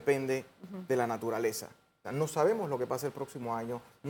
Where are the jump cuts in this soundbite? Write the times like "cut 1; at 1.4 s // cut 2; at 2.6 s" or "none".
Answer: cut 1; at 2.0 s